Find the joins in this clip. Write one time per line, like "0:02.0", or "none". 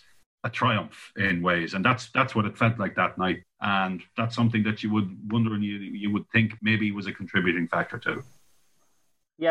0:03.4
0:06.6